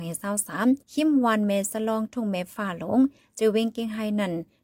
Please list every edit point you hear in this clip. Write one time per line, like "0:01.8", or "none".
none